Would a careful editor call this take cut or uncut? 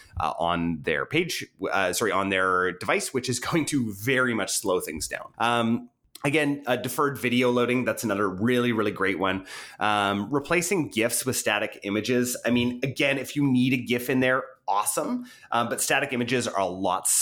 uncut